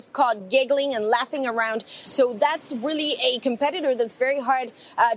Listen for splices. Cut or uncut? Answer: cut